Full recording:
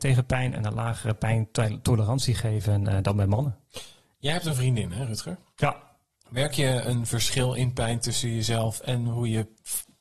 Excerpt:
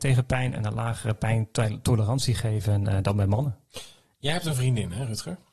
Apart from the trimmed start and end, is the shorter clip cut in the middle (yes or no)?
no